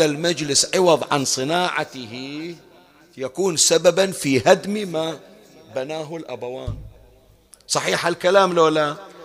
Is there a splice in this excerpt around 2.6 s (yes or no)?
no